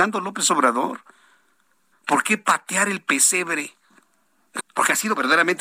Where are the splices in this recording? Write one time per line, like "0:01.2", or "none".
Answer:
0:01.9
0:04.6